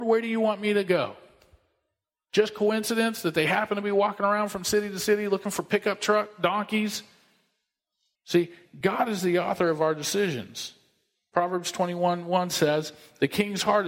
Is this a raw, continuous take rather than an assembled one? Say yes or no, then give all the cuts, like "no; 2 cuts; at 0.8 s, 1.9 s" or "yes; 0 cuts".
no; 1 cut; at 8.1 s